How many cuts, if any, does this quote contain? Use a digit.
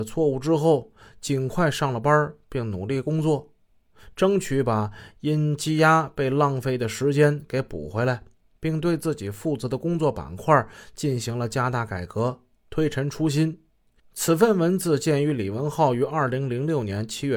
1